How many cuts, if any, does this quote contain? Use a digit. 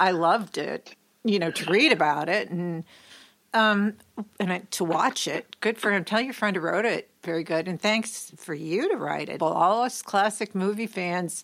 1